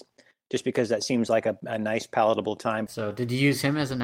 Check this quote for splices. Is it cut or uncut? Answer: cut